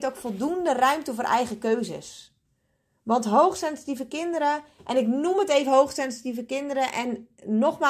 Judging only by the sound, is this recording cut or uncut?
uncut